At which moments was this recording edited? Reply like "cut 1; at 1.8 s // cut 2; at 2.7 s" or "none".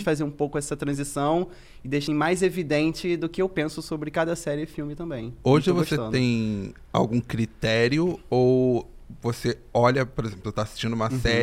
cut 1; at 2.1 s

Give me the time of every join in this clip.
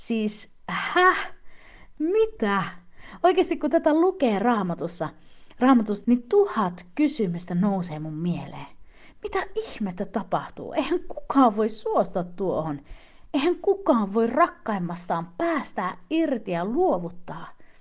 cut 1; at 6.0 s

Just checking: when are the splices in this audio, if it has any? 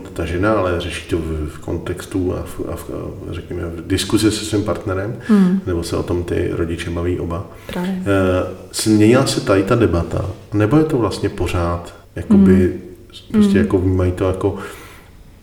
cut 1; at 12.0 s // cut 2; at 13.3 s

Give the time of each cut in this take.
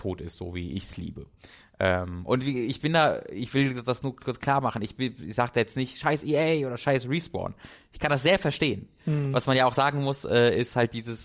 none

